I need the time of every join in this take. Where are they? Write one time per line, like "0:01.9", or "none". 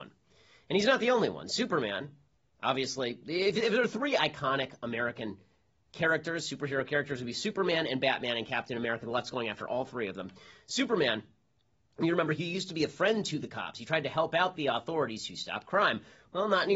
none